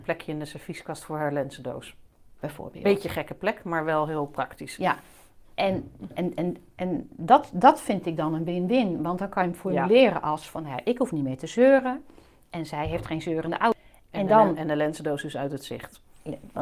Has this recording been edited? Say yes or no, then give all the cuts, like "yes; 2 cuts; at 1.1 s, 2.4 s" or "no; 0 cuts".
no; 0 cuts